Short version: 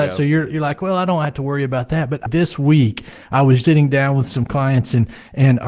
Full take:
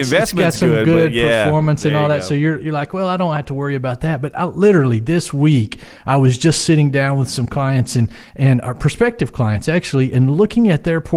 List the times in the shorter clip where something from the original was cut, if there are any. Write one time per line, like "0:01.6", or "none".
0:02.3
0:03.6